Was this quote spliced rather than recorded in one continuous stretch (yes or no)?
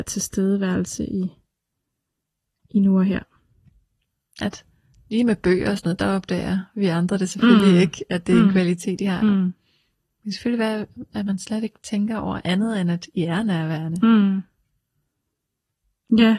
yes